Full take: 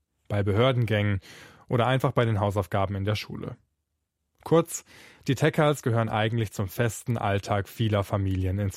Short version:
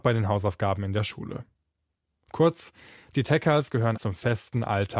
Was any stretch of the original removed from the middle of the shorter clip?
yes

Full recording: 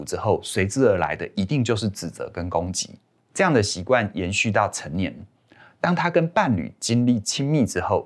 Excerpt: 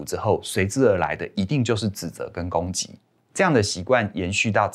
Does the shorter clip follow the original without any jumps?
yes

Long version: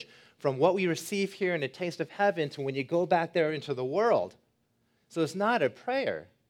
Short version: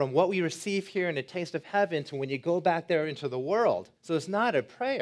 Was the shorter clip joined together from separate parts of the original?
yes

